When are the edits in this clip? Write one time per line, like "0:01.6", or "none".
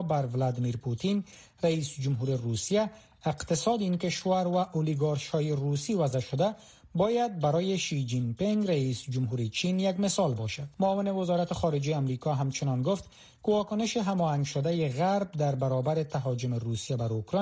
0:10.7